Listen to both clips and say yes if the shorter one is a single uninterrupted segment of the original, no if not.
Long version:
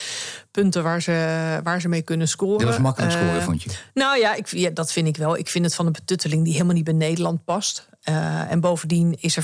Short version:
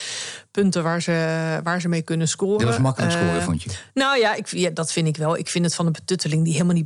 yes